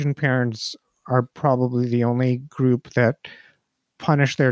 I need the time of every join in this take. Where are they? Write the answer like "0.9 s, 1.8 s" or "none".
none